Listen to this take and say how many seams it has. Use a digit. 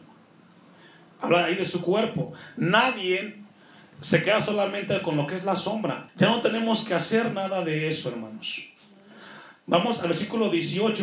1